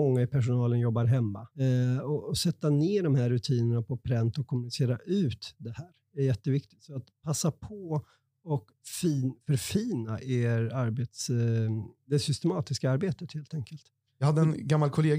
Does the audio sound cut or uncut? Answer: cut